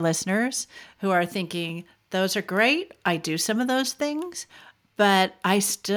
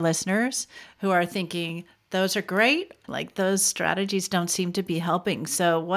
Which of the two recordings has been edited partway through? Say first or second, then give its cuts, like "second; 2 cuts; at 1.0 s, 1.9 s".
second; 1 cut; at 3.0 s